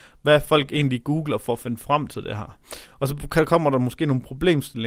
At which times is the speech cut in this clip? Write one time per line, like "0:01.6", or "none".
none